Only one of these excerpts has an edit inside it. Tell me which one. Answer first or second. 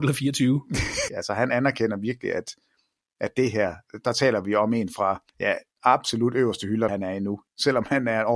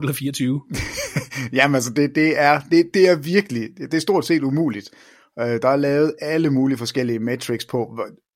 first